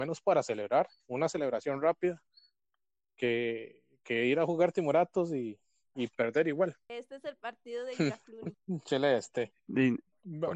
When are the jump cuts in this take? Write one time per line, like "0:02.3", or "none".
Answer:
0:09.7